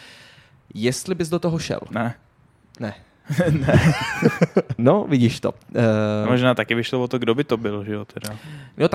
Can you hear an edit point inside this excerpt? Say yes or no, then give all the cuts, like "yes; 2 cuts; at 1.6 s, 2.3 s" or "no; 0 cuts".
yes; 1 cut; at 4.8 s